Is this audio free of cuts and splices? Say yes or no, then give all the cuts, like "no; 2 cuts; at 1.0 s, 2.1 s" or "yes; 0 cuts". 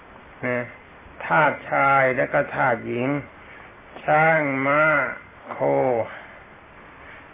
no; 1 cut; at 1.2 s